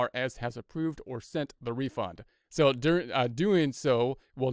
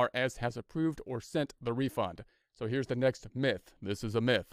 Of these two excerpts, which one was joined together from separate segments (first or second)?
first